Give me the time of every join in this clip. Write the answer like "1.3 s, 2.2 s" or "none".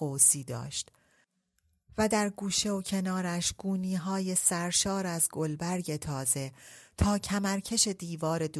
none